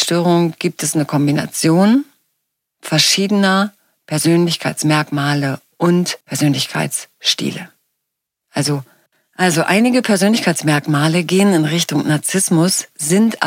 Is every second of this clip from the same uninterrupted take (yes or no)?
no